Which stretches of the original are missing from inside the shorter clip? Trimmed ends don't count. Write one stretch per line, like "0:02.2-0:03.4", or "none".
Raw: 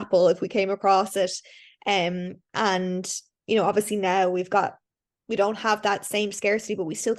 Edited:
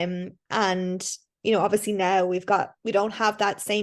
0:04.8-0:05.2